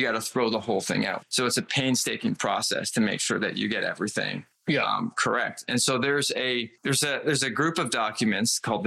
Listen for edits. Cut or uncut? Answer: uncut